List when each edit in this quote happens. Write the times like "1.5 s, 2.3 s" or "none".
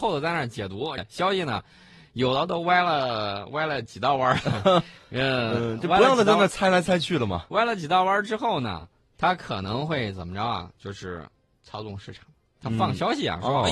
1.0 s